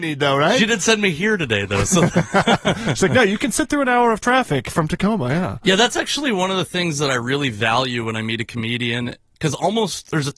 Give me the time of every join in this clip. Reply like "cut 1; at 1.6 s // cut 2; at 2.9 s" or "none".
none